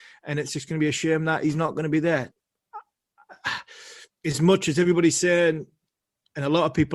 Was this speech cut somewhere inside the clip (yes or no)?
yes